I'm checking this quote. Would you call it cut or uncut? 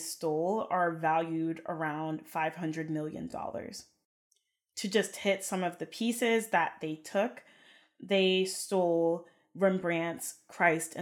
uncut